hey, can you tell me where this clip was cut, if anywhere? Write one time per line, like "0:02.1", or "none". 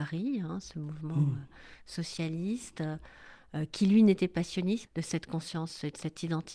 0:04.9